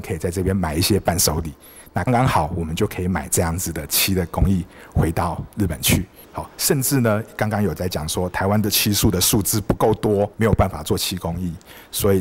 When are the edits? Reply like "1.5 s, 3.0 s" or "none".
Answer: 2.1 s, 6.2 s, 10.3 s